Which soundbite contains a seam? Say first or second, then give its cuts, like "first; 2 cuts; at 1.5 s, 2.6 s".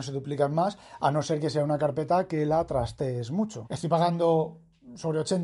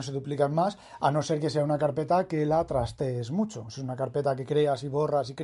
first; 1 cut; at 3.6 s